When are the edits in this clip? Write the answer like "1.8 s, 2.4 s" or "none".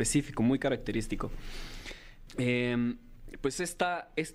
2.3 s